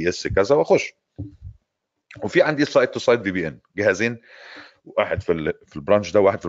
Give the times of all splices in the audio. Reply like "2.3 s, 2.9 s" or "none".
none

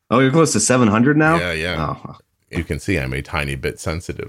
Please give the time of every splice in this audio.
2.5 s

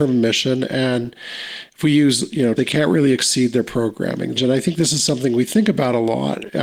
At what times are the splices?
2.6 s, 4.3 s

